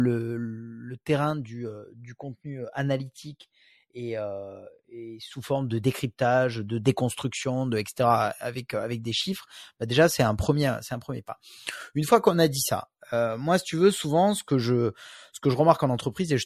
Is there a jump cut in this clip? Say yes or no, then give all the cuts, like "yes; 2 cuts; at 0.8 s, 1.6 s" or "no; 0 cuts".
no; 0 cuts